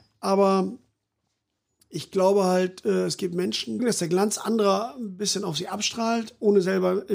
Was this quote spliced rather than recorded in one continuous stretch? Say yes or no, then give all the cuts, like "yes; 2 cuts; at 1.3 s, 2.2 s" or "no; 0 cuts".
yes; 1 cut; at 3.8 s